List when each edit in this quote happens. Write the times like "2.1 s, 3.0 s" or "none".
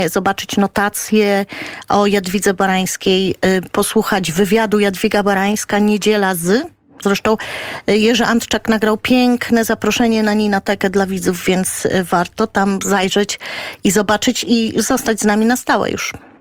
7.0 s